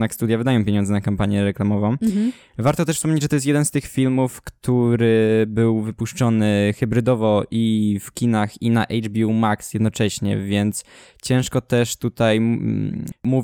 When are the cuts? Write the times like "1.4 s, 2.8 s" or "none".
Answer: none

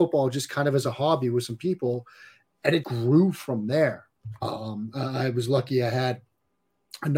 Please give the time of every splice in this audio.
2.8 s

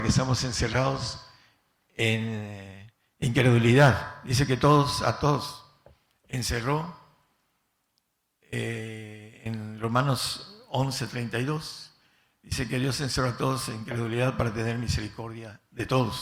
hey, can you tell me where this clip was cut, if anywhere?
none

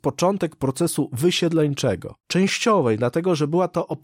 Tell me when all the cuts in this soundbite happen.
2.2 s

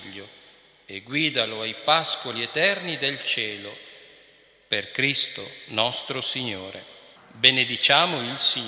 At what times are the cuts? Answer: 7.2 s

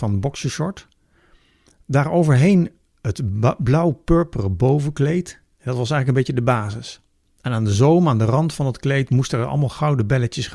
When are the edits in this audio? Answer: none

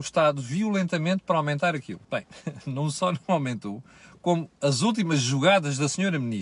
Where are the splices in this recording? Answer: 2.0 s

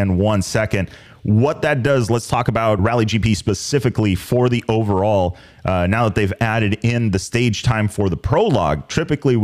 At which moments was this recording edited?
2.8 s

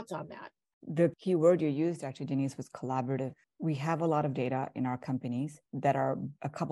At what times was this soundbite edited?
none

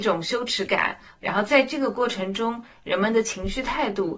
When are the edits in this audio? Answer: 1.2 s

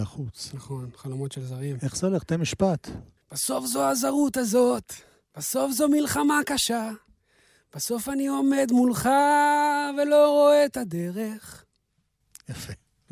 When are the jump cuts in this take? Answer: none

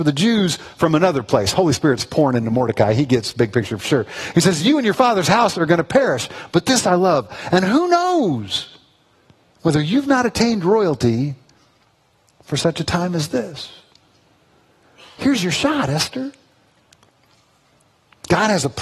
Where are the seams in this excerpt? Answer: none

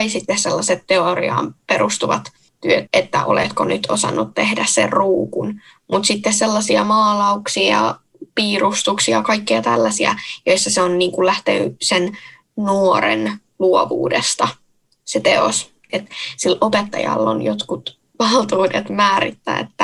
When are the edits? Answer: 2.9 s, 15.9 s

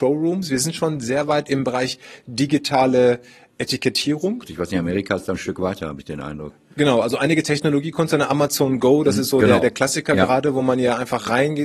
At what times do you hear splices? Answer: 4.5 s

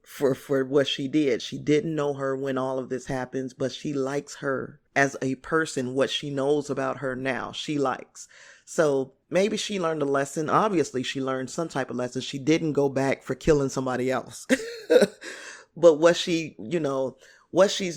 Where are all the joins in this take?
1.4 s, 4.9 s, 9.2 s

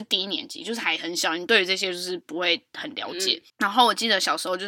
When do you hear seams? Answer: 3.5 s

